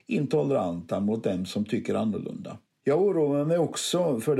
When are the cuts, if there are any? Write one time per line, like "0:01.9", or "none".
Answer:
0:02.7